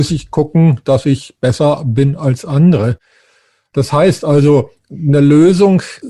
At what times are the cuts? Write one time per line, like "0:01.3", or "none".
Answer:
none